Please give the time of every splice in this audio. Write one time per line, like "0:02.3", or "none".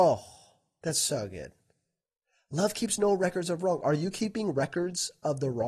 none